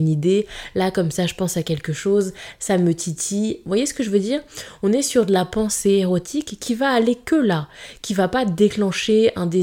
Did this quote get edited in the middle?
yes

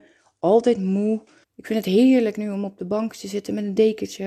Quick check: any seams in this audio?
yes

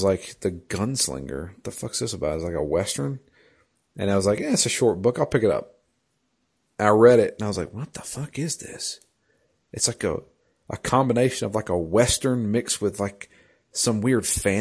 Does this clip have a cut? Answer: no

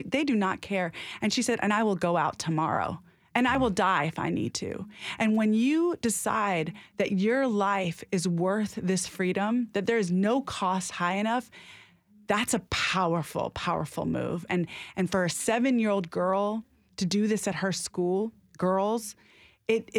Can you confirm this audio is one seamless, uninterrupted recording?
no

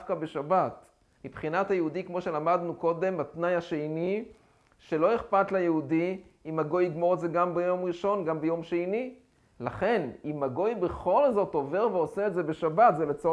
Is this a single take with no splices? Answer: no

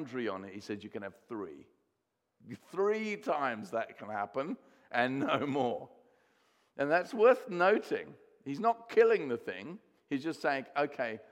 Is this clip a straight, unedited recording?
yes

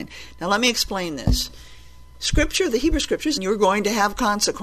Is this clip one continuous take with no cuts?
no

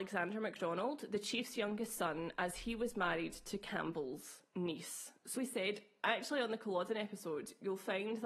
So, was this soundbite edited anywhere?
yes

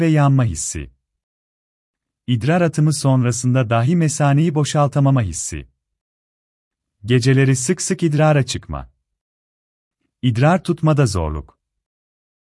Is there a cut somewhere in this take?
no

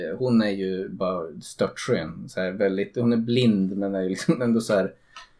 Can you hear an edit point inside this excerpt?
no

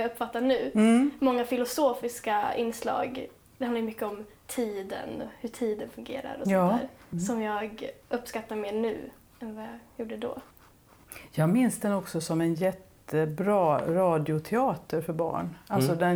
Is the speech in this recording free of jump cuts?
no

